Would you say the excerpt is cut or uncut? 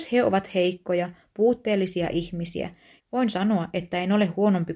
cut